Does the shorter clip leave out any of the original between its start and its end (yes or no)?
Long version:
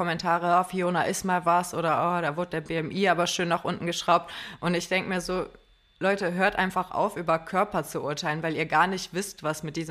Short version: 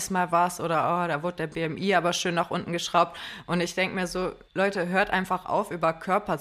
yes